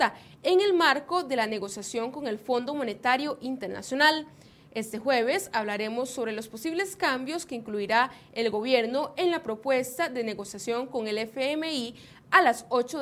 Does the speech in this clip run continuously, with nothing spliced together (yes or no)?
yes